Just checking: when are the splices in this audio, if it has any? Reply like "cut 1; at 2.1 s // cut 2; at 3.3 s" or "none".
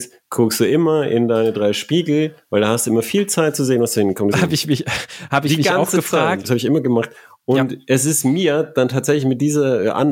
cut 1; at 4.3 s // cut 2; at 6.4 s